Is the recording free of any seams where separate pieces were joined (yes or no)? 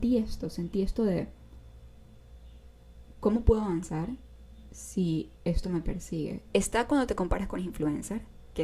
no